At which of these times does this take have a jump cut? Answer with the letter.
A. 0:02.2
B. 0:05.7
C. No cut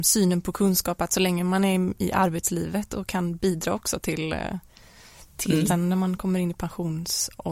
B